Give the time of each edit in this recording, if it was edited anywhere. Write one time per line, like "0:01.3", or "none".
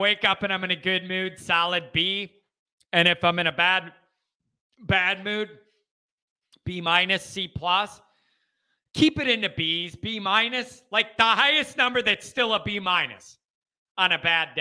none